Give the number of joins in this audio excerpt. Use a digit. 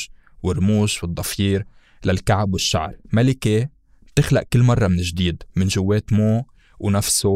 2